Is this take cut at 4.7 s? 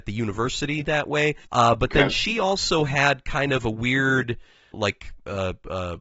yes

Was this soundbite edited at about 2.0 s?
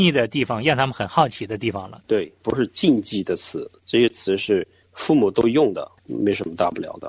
yes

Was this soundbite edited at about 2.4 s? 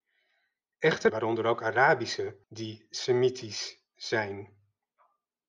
yes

